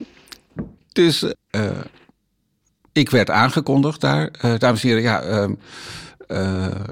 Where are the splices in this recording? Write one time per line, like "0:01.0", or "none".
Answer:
0:01.3